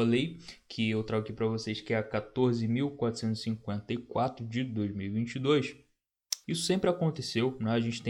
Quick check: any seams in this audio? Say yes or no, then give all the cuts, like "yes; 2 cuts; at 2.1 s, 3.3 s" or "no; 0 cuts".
yes; 1 cut; at 6.4 s